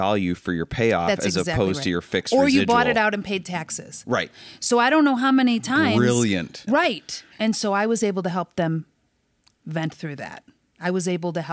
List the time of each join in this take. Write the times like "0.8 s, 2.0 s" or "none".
6.7 s